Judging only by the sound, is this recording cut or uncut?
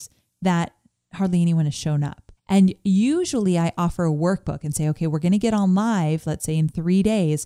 cut